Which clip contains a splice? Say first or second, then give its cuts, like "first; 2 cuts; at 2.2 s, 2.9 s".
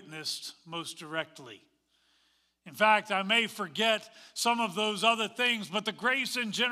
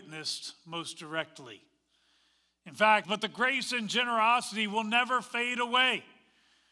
second; 1 cut; at 3.0 s